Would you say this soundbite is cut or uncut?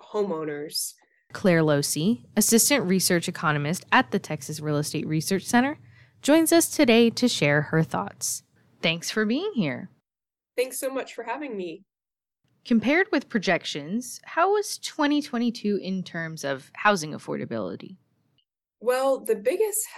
cut